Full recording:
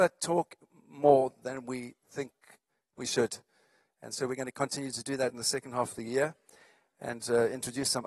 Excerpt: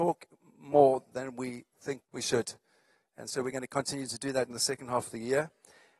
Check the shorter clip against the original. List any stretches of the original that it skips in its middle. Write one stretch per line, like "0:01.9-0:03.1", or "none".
0:02.3-0:02.9